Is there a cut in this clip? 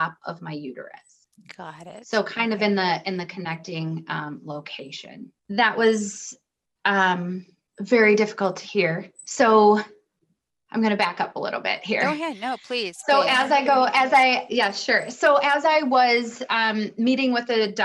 no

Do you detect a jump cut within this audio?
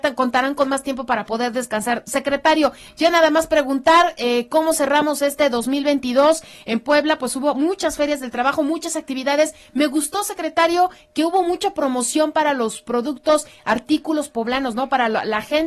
no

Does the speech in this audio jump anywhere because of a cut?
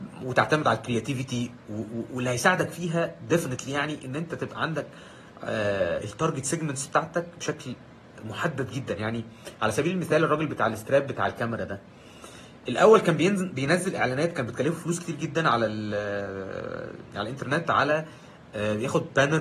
yes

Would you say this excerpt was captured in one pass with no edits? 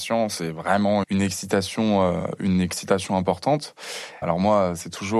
no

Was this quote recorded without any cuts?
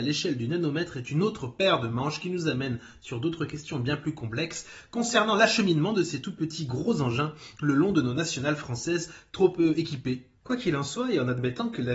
no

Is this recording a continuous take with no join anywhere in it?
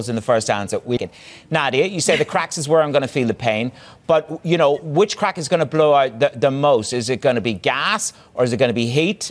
no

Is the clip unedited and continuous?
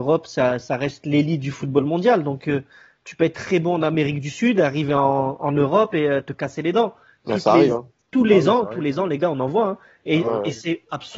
yes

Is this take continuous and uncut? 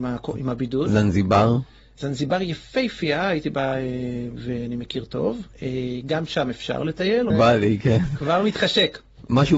no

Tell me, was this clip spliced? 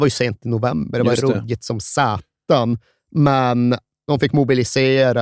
no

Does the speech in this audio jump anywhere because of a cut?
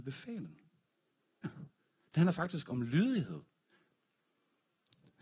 yes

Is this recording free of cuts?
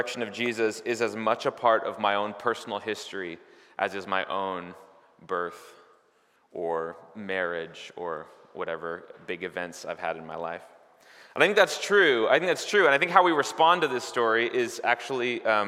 yes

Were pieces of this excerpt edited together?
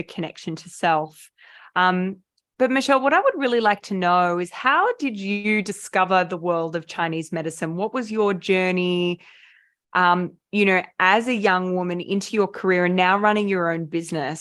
no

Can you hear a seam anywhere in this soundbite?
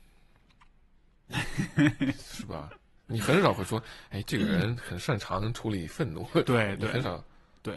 no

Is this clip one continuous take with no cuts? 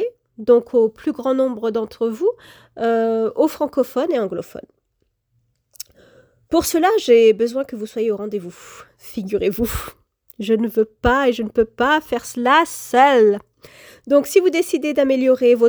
yes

